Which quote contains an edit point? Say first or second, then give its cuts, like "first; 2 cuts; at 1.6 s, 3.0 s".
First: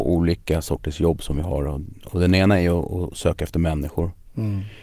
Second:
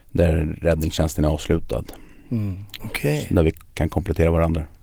second; 1 cut; at 2.8 s